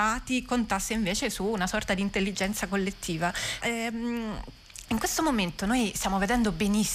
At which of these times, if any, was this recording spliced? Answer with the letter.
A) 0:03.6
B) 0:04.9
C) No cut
A